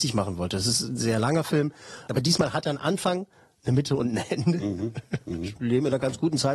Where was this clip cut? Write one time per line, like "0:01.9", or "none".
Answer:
0:02.1
0:05.6